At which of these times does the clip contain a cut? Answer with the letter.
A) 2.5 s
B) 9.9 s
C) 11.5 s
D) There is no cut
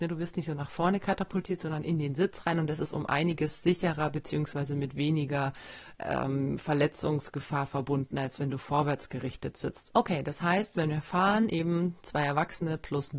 B